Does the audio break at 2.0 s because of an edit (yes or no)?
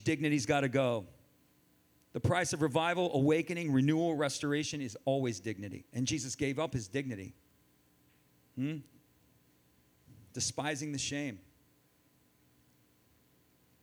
no